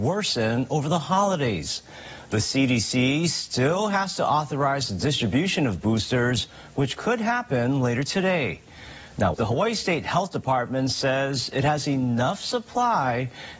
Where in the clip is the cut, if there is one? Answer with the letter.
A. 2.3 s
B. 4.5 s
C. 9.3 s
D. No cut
C